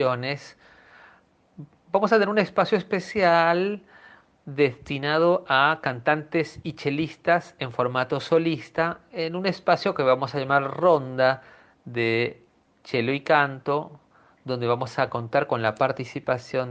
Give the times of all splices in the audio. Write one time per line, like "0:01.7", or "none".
none